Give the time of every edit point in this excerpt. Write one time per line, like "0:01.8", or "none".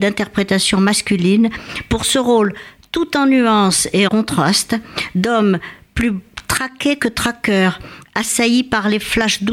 0:04.1